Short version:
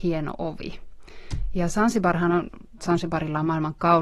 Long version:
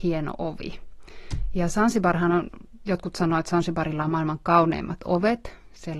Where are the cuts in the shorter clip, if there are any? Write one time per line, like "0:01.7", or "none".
0:02.8